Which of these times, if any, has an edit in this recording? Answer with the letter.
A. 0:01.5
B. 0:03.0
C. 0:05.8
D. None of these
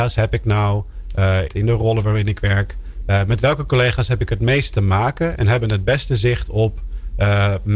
A